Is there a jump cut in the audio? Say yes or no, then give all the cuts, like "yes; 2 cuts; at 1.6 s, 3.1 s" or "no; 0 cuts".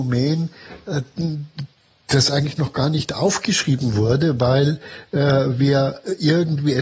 no; 0 cuts